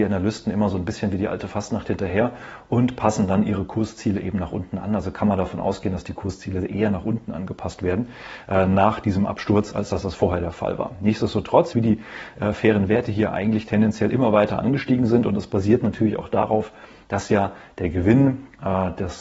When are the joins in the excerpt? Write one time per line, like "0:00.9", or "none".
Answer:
0:11.7

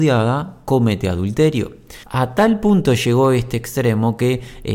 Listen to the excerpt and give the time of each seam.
0:02.0

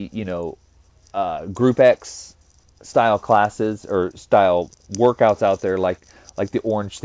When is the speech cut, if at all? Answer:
none

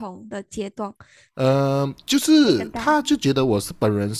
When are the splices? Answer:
0:01.3

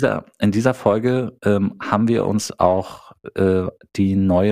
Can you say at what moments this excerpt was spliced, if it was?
none

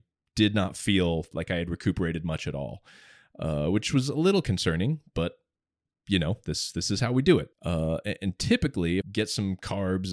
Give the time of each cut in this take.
0:07.5
0:09.0

